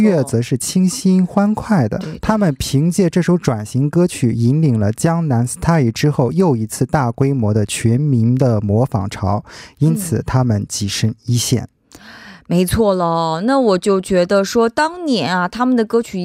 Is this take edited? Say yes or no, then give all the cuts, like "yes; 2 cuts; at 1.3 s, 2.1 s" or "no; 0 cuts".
yes; 1 cut; at 2.0 s